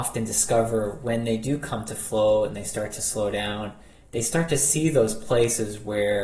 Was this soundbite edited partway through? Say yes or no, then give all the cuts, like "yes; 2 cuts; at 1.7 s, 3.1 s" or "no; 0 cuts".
no; 0 cuts